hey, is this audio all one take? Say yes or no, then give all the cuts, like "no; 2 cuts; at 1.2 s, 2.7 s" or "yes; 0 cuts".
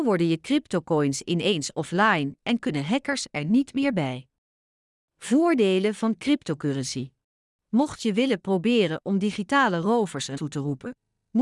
no; 2 cuts; at 7.5 s, 10.3 s